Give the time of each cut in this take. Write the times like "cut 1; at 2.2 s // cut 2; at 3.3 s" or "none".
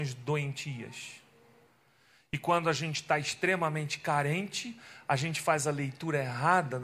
none